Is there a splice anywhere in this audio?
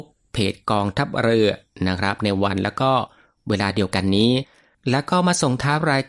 no; 0 cuts

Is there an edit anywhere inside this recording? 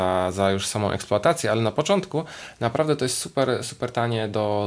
yes; 1 cut; at 3.6 s

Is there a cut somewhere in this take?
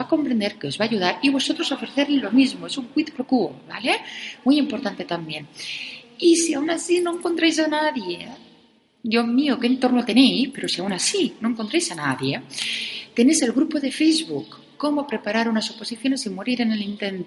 no; 0 cuts

